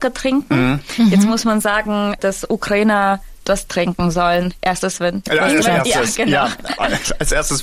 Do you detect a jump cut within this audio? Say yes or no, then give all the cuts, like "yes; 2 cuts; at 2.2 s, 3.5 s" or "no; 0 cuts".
yes; 2 cuts; at 2.2 s, 5.6 s